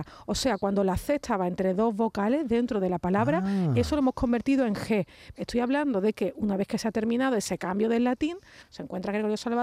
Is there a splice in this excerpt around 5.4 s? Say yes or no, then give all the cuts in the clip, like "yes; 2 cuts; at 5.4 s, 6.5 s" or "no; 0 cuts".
yes; 2 cuts; at 5.4 s, 8.6 s